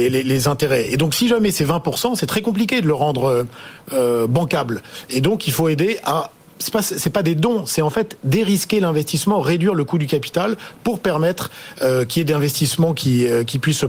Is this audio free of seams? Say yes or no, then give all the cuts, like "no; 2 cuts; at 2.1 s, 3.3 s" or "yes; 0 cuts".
yes; 0 cuts